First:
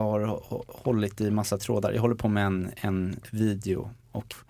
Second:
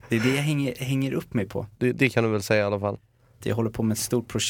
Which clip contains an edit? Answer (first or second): second